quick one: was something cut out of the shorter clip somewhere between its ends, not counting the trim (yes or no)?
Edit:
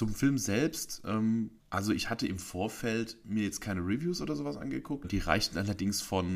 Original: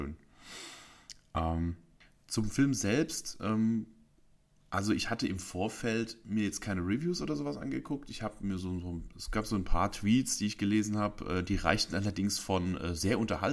yes